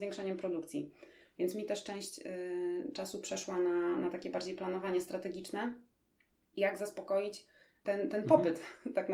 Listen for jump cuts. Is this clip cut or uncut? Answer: uncut